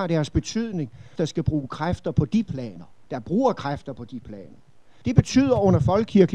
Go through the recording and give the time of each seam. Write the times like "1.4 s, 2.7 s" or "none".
1.2 s, 3.1 s, 5.0 s